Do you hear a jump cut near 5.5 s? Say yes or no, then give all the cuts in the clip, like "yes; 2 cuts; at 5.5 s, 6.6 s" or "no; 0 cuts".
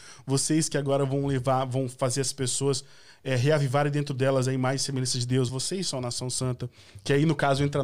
no; 0 cuts